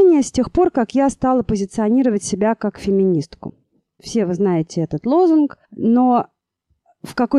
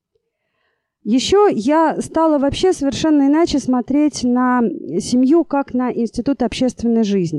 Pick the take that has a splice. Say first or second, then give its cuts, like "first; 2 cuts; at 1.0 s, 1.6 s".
first; 2 cuts; at 4.0 s, 5.6 s